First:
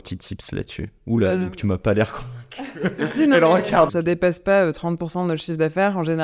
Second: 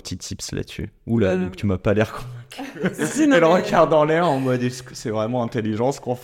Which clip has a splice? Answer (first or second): first